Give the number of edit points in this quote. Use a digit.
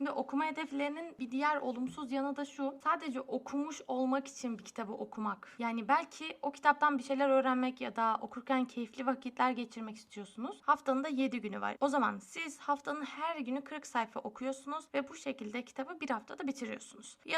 2